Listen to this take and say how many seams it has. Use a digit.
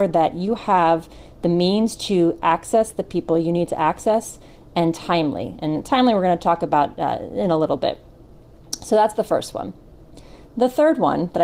1